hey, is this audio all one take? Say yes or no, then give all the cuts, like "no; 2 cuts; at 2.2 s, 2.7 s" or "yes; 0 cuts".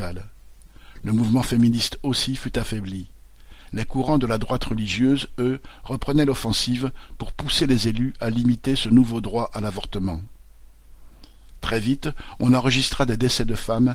no; 1 cut; at 11.6 s